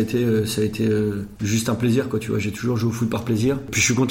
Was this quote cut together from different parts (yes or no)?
no